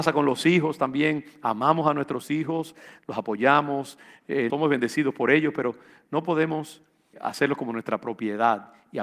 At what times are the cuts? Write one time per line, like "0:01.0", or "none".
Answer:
0:04.5
0:07.1